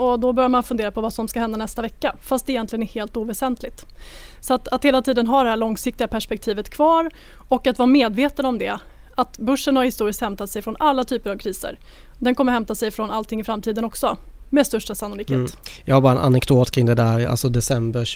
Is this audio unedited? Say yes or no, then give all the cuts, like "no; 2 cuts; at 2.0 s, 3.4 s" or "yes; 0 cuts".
yes; 0 cuts